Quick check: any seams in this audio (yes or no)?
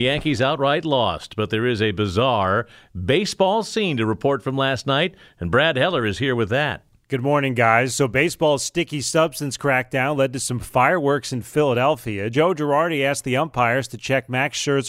no